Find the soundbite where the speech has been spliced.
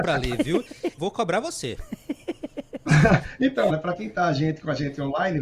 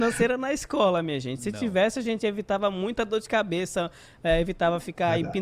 first; 2 cuts; at 1.0 s, 3.7 s

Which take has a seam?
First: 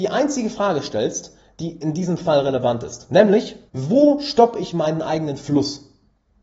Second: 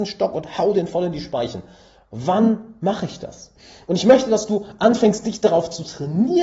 first; 1 cut; at 3.7 s

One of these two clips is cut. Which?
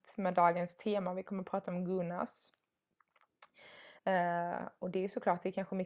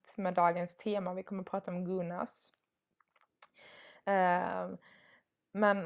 first; 1 cut; at 4.0 s

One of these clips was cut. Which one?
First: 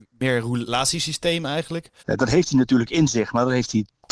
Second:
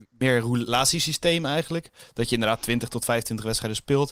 first; 1 cut; at 2.0 s

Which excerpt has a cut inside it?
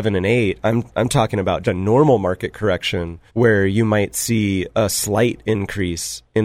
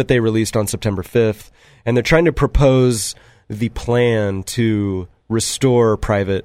first; 2 cuts; at 1.6 s, 3.3 s

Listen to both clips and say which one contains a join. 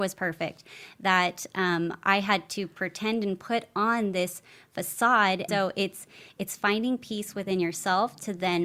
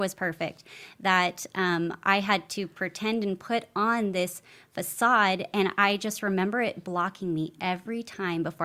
first; 1 cut; at 5.5 s

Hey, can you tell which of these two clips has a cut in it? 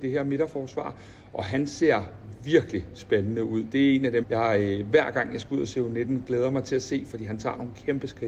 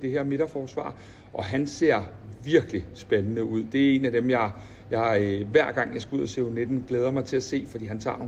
first; 1 cut; at 4.2 s

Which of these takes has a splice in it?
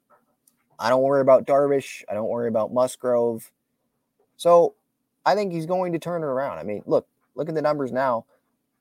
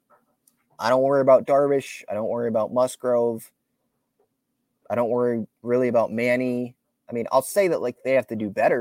first; 1 cut; at 4.3 s

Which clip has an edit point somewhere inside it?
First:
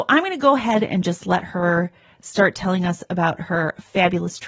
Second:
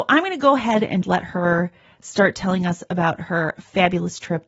second; 1 cut; at 1.0 s

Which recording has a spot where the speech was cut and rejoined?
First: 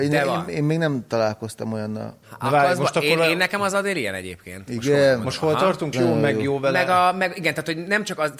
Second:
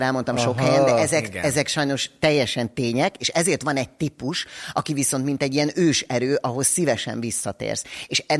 first; 2 cuts; at 2.2 s, 5.9 s

